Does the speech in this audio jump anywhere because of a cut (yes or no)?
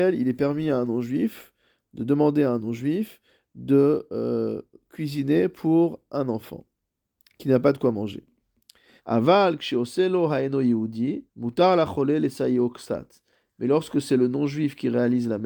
yes